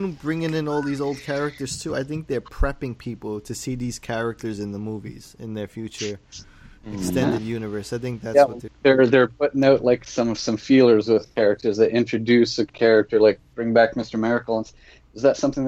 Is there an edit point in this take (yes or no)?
no